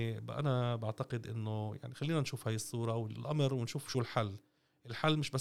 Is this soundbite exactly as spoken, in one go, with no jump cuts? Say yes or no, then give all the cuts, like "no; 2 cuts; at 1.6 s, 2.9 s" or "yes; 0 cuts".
yes; 0 cuts